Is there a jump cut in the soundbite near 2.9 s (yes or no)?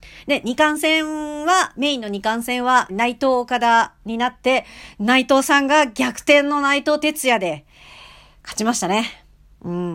yes